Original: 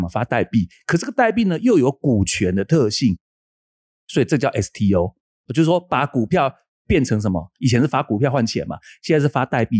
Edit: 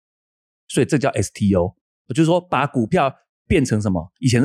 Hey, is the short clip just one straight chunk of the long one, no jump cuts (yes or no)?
yes